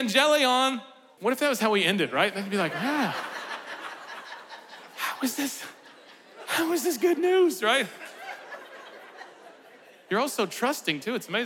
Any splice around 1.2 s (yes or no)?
yes